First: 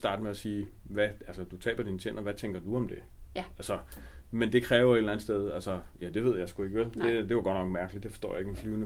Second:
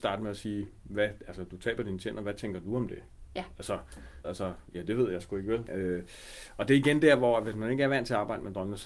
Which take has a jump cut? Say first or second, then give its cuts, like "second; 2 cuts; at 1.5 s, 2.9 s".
second; 2 cuts; at 4.2 s, 5.7 s